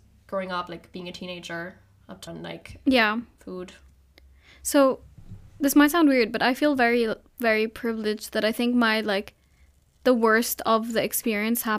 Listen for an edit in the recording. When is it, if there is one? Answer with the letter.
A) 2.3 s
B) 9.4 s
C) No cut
A